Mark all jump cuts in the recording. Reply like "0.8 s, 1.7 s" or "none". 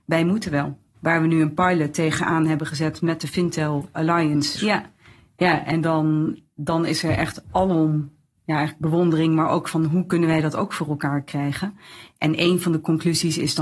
0.9 s, 4.6 s

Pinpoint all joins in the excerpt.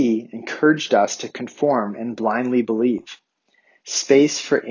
3.8 s

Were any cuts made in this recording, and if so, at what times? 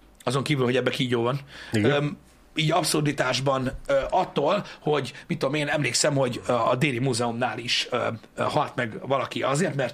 none

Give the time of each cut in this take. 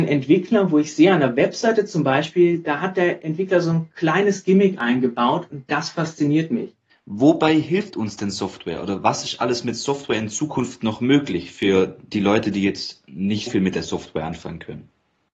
6.9 s, 13.5 s

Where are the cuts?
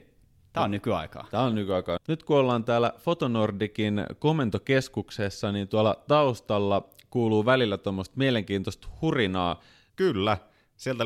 2.0 s, 9.9 s

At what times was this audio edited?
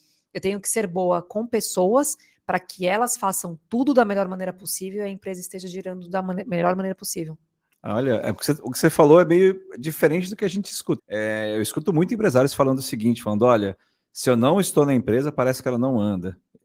11.0 s

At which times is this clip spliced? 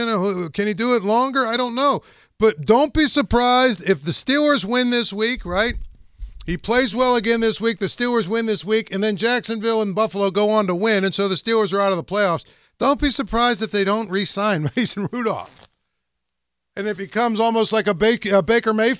none

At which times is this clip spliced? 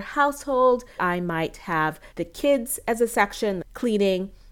1.0 s, 2.1 s, 3.6 s

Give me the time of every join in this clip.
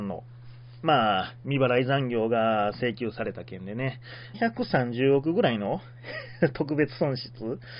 4.3 s

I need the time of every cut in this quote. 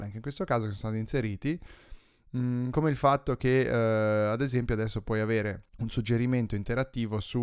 5.7 s

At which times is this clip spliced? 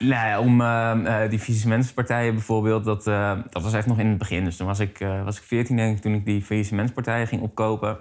none

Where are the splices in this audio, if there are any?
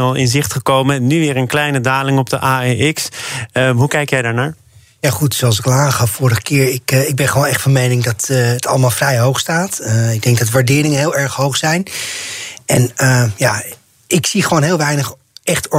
none

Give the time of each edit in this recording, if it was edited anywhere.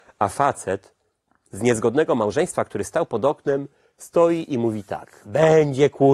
5.2 s

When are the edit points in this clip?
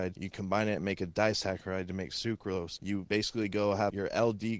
none

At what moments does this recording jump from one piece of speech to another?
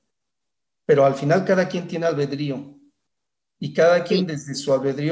none

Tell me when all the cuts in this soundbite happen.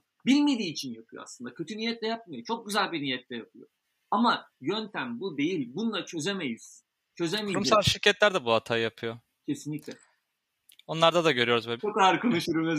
11.8 s

